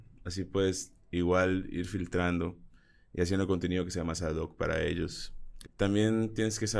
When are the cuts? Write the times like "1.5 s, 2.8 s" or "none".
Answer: 5.6 s